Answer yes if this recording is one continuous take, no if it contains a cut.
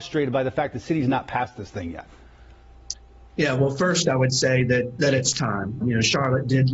no